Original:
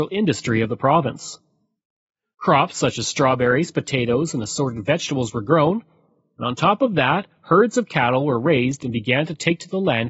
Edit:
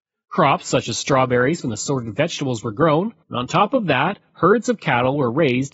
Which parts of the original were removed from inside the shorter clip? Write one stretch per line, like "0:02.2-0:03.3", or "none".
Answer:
0:03.7-0:04.3
0:05.9-0:06.3